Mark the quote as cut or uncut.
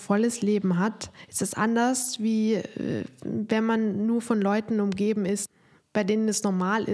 uncut